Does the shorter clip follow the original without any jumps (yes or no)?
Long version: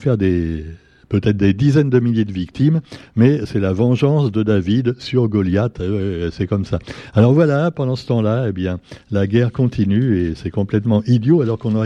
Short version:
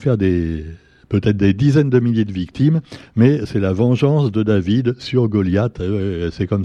yes